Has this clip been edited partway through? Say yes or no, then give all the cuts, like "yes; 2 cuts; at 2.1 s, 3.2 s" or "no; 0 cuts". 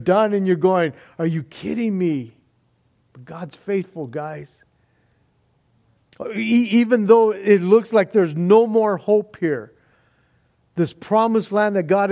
no; 0 cuts